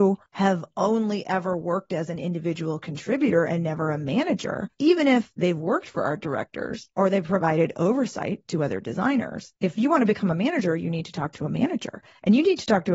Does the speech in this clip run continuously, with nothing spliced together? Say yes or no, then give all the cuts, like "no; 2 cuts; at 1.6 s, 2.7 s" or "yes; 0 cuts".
no; 1 cut; at 4.7 s